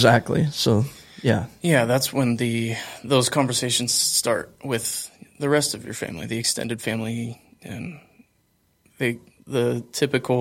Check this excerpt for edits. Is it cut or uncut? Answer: uncut